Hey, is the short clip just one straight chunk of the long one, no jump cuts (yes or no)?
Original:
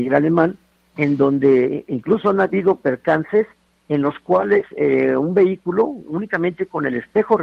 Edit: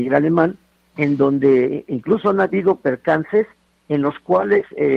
yes